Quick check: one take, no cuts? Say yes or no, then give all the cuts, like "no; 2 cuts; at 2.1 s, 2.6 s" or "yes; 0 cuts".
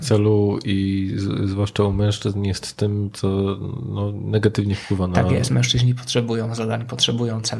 yes; 0 cuts